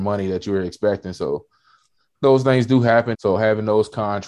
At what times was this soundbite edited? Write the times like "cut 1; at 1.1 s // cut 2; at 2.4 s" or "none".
cut 1; at 3.1 s